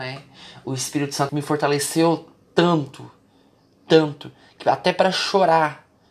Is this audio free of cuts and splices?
no; 1 cut; at 1.3 s

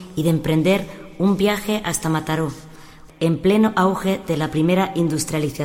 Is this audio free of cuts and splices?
no; 1 cut; at 3.1 s

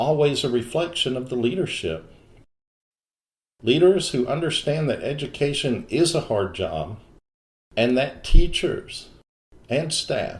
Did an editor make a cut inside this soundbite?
no; 0 cuts

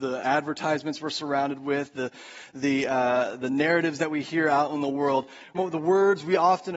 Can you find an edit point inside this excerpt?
yes; 1 cut; at 5.5 s

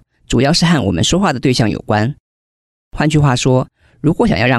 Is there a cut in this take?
no; 0 cuts

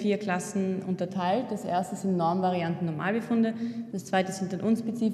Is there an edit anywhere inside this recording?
yes; 1 cut; at 3.9 s

